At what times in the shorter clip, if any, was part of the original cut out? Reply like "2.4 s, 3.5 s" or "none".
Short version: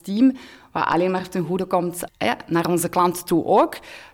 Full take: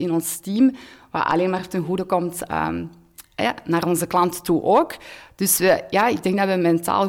2.1 s